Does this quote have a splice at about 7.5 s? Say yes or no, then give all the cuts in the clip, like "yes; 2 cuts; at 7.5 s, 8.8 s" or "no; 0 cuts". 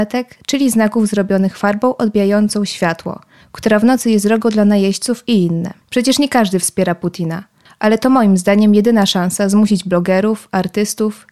no; 1 cut; at 5.8 s